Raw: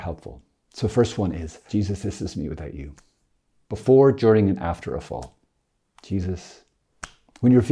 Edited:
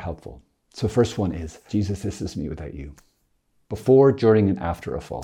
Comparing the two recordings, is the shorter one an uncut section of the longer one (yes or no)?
yes